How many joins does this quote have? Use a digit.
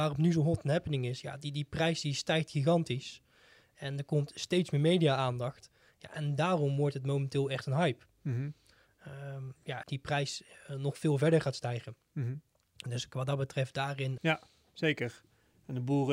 2